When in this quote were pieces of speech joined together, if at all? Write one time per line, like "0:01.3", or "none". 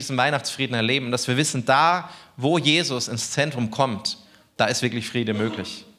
none